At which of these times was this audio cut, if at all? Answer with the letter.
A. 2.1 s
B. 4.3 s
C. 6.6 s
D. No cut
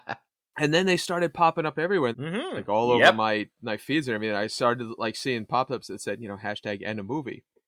A